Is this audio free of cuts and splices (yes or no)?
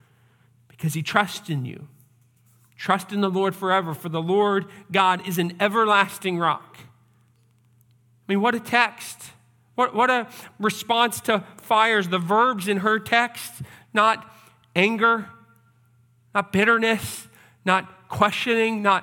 yes